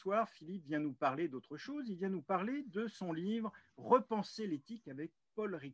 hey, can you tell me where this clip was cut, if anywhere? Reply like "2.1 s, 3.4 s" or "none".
none